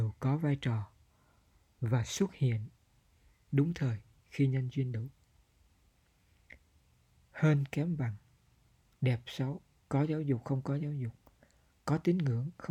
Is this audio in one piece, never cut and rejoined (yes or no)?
yes